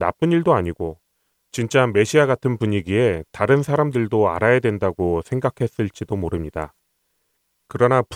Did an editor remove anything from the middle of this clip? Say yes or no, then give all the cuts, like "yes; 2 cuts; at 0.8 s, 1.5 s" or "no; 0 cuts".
no; 0 cuts